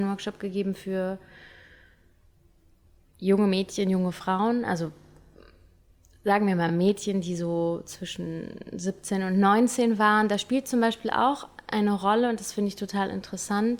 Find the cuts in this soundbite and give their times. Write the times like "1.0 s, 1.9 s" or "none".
none

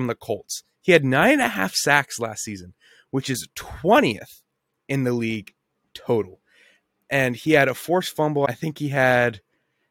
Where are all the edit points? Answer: none

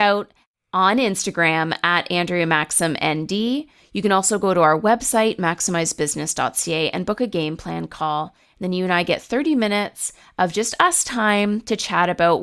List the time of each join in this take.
none

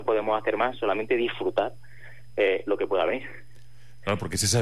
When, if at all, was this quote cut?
none

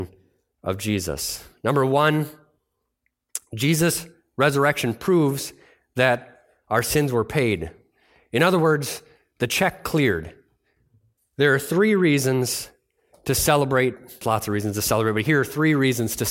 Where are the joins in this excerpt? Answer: 11.2 s, 14.2 s

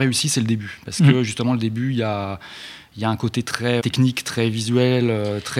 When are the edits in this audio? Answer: 3.8 s

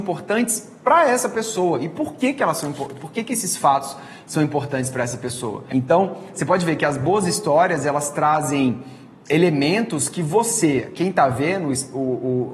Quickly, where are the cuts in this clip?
5.7 s

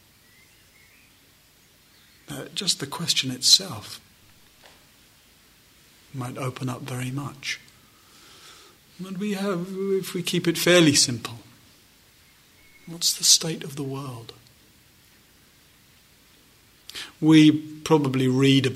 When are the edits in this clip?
none

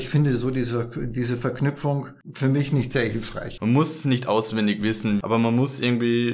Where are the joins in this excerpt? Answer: 3.6 s, 5.2 s

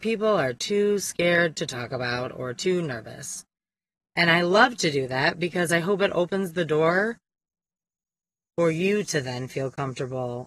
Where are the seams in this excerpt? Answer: none

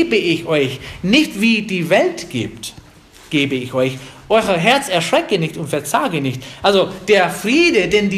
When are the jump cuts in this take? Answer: none

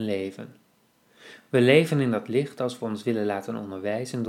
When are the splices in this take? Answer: none

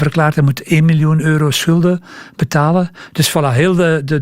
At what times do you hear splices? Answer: 3.1 s

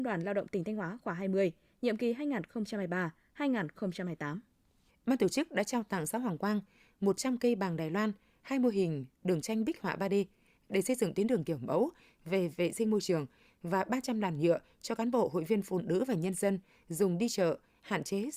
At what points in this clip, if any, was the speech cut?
4.9 s

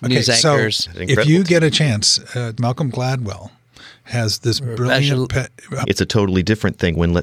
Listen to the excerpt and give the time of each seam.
2.6 s, 5.8 s

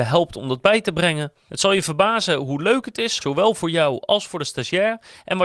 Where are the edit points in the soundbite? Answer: 1.5 s, 3.2 s

